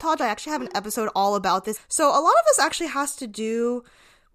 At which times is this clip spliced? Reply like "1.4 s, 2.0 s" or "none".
1.7 s